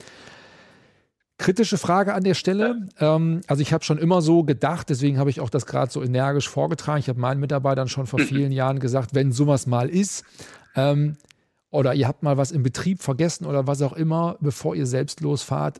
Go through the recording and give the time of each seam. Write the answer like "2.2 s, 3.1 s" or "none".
none